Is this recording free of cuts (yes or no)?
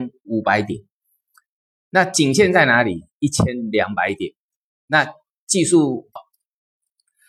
no